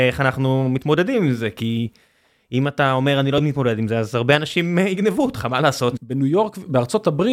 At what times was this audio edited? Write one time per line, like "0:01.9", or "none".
0:05.9